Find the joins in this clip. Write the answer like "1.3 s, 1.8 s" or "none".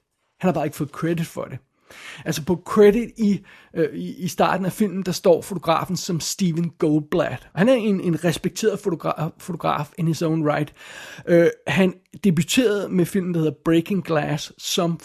7.5 s